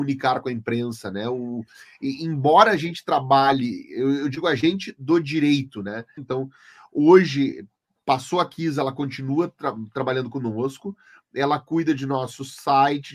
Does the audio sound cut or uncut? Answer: cut